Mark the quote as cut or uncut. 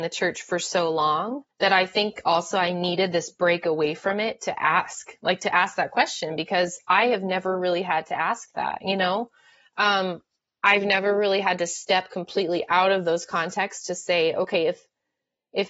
cut